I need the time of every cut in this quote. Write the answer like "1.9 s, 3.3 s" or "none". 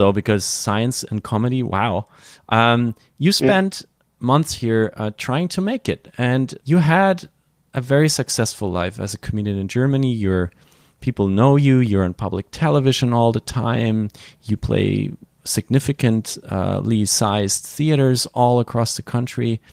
6.6 s